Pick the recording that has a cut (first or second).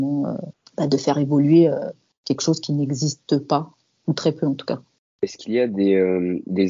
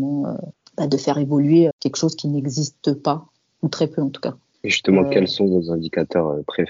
second